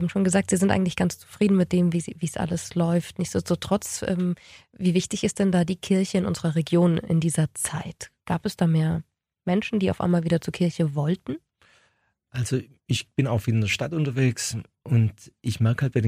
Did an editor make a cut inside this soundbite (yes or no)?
no